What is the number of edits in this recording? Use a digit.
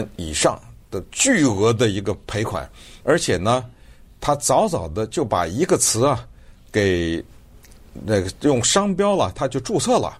1